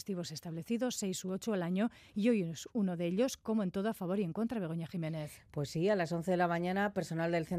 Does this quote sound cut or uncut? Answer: uncut